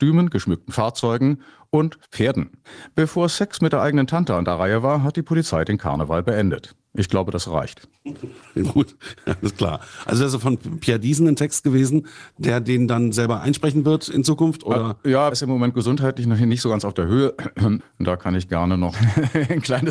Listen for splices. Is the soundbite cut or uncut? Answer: cut